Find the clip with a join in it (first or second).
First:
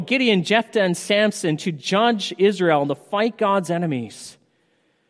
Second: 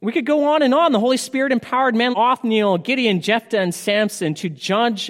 second